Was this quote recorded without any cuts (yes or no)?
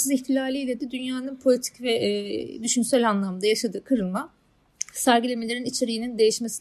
yes